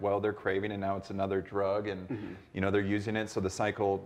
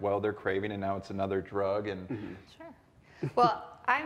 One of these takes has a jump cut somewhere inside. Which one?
second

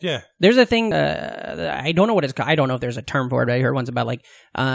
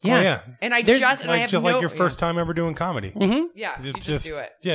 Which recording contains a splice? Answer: first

